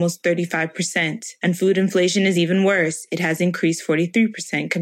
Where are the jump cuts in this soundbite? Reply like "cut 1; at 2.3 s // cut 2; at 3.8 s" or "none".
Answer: none